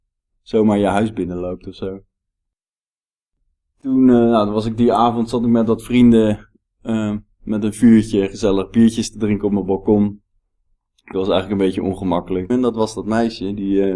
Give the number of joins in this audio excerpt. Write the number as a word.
two